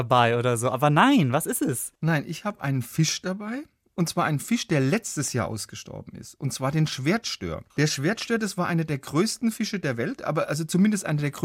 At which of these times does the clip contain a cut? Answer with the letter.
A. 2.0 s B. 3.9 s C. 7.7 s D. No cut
C